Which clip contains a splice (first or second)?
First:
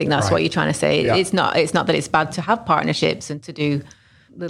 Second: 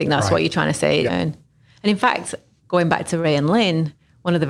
second